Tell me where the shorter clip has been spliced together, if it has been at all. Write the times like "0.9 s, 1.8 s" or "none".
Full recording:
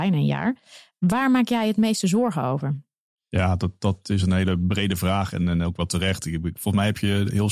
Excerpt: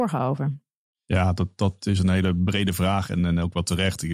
none